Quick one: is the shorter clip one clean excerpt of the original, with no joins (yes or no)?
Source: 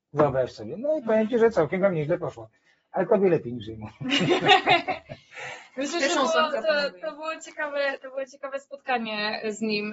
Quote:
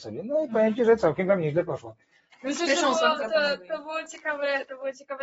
no